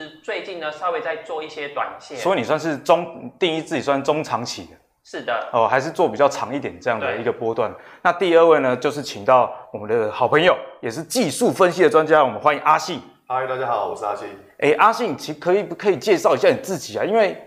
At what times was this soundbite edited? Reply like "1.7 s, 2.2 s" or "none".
none